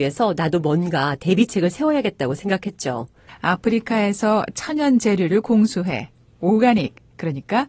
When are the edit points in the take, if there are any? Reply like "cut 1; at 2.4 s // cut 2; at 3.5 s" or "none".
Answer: cut 1; at 3.3 s

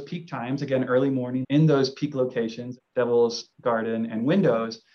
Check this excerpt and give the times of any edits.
cut 1; at 1.4 s // cut 2; at 2.8 s

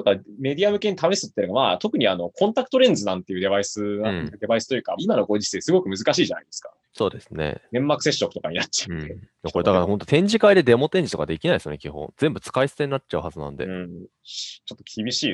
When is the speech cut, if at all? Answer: cut 1; at 5.0 s

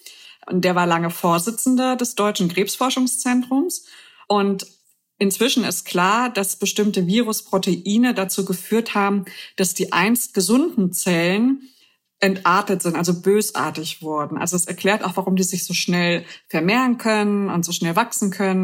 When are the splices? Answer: cut 1; at 4.2 s

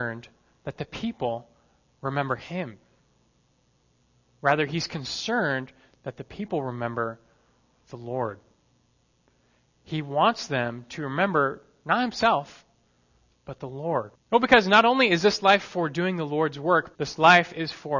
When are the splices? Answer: cut 1; at 14.2 s // cut 2; at 17.0 s

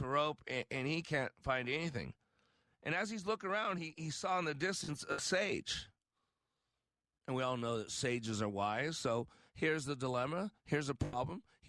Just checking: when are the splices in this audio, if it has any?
none

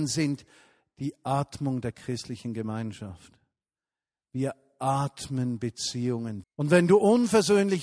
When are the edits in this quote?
cut 1; at 6.4 s

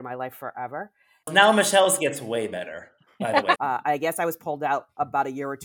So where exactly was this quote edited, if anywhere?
cut 1; at 1.2 s // cut 2; at 3.6 s

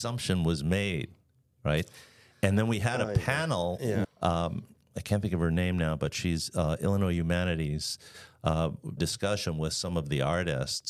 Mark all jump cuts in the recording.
cut 1; at 4.0 s // cut 2; at 9.0 s

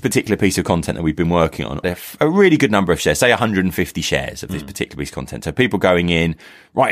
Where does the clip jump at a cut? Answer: cut 1; at 1.8 s

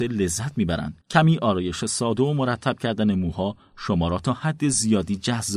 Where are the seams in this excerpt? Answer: cut 1; at 1.0 s

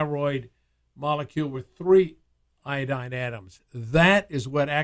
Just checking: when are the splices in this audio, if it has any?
none

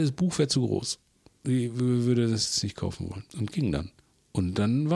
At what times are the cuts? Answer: cut 1; at 3.3 s

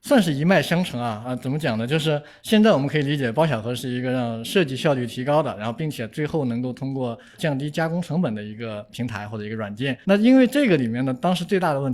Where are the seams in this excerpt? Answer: cut 1; at 10.0 s

